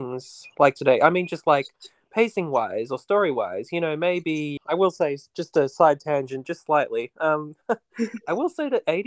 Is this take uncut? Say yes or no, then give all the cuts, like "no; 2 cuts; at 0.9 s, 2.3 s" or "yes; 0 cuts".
no; 1 cut; at 4.6 s